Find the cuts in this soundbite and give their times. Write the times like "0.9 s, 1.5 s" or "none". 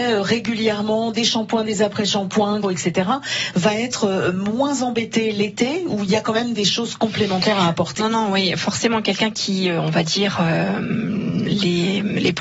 2.6 s, 8.0 s

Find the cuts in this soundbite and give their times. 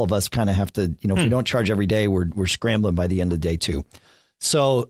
none

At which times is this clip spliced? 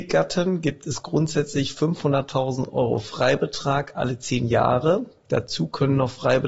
none

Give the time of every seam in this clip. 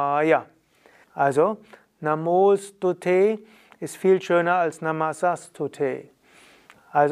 1.0 s

